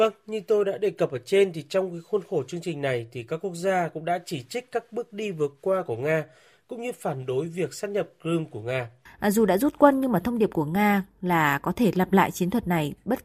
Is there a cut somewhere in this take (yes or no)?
yes